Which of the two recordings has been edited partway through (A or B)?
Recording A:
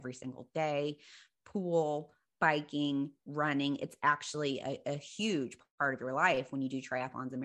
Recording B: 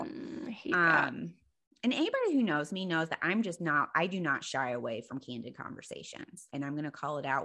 B